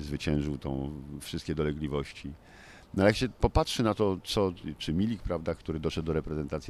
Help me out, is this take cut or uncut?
cut